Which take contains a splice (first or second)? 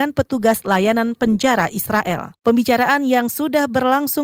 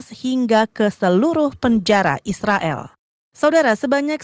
second